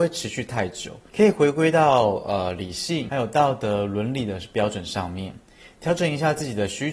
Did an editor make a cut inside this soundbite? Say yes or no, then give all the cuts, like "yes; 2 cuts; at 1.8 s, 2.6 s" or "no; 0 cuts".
yes; 1 cut; at 1.1 s